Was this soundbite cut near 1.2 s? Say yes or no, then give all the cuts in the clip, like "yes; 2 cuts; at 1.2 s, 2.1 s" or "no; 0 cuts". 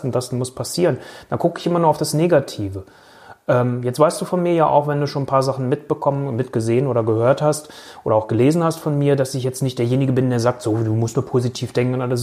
no; 0 cuts